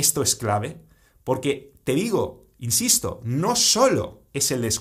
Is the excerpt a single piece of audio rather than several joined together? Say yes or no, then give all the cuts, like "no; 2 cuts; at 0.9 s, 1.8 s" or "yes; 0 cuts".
yes; 0 cuts